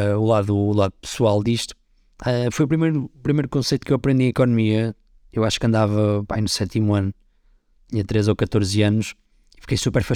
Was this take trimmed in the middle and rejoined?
no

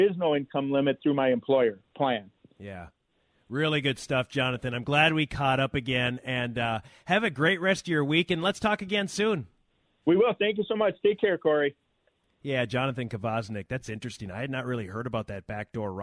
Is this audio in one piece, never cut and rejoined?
yes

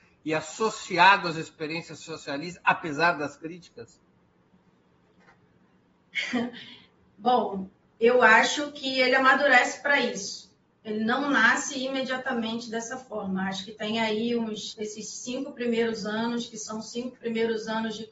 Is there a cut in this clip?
no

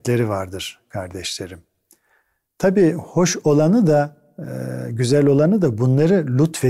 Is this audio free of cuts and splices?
yes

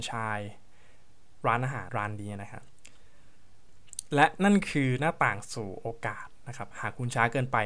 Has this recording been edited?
yes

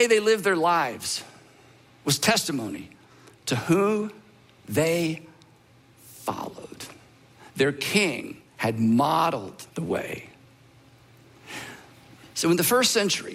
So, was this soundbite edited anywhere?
yes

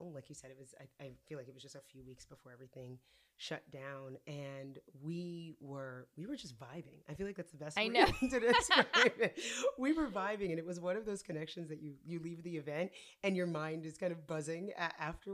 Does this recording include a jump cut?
no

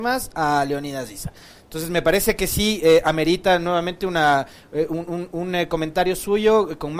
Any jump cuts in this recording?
yes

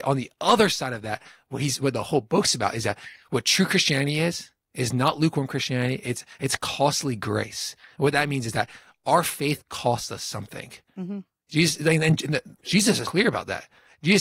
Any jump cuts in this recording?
yes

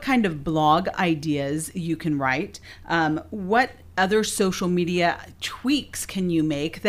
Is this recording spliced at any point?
no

